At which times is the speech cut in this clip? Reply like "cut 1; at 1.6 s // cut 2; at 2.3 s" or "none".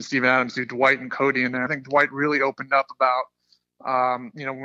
cut 1; at 1.7 s